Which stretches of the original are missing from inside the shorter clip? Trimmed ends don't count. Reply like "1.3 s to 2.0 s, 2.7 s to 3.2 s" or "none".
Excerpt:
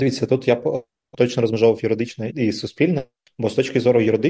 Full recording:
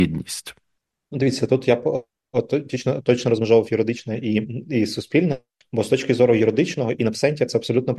2.3 s to 3.0 s, 4.2 s to 4.6 s